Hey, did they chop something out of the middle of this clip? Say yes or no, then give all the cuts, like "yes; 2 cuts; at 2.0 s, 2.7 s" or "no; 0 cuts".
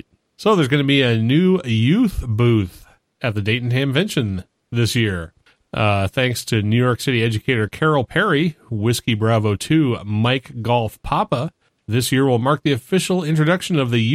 yes; 1 cut; at 5.6 s